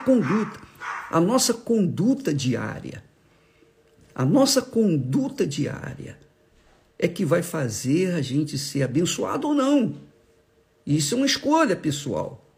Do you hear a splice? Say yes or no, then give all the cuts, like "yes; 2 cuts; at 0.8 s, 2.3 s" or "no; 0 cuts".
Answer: no; 0 cuts